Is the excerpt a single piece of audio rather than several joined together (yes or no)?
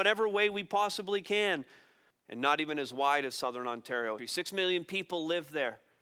no